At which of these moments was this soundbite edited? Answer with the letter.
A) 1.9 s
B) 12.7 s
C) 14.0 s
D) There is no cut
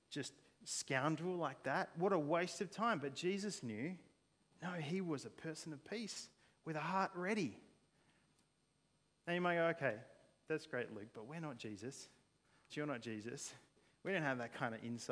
B